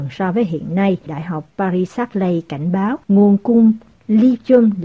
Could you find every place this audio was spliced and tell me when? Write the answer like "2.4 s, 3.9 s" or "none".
1.1 s, 3.0 s

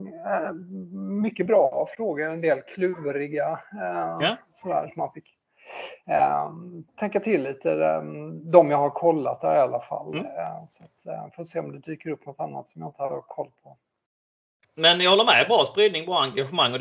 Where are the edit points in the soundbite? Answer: 6.9 s, 14.6 s

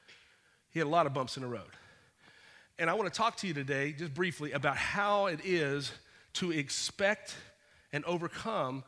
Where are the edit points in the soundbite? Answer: none

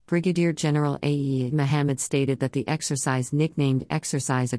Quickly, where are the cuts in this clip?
1.5 s

